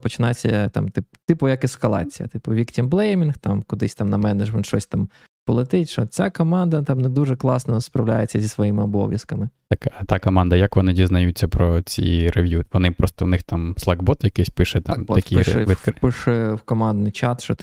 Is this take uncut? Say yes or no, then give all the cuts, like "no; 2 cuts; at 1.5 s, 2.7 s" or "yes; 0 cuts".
yes; 0 cuts